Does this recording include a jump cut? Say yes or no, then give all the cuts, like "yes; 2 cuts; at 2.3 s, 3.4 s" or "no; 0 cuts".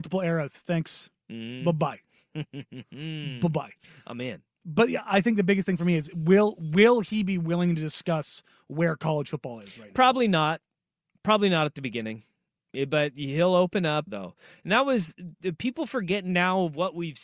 yes; 1 cut; at 14.1 s